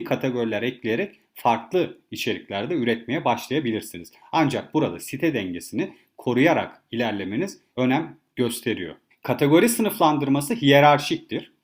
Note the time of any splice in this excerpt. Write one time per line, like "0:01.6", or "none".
none